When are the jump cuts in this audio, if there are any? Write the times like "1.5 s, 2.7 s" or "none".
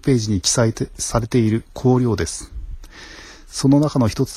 none